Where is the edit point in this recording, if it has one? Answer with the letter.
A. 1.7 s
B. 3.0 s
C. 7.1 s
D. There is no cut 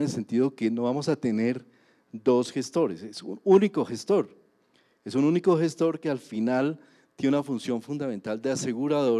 D